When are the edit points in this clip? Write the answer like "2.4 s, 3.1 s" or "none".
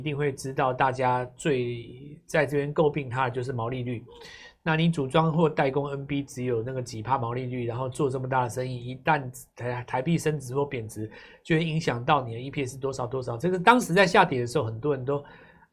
none